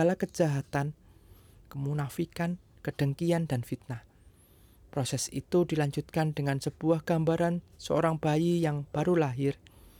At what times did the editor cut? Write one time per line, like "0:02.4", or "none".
0:01.6